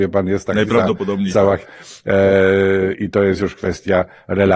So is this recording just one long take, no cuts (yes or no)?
no